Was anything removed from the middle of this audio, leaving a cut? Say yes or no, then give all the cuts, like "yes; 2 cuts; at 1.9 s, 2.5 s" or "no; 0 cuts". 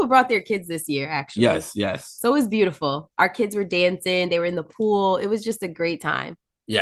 no; 0 cuts